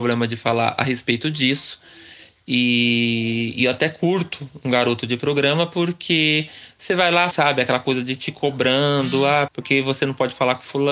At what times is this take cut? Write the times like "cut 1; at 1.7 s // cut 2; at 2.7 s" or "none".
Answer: cut 1; at 7.3 s // cut 2; at 9.5 s